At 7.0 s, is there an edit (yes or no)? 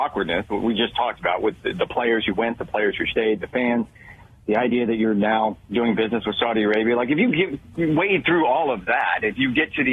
no